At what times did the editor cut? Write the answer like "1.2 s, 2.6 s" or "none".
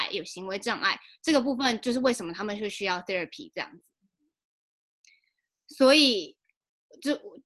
none